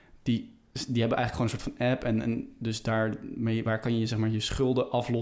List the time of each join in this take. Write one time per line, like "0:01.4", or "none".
none